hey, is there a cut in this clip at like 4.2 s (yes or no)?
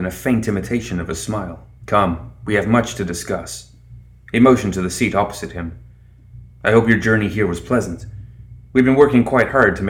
no